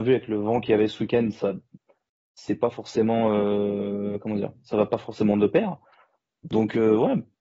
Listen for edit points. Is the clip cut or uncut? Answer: uncut